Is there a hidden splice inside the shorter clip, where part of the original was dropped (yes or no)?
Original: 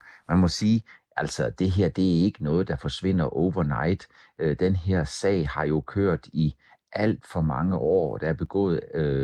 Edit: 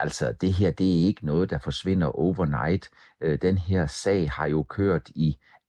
no